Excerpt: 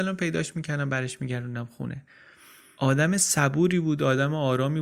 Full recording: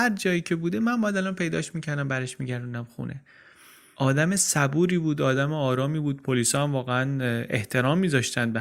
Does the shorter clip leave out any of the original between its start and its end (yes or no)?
no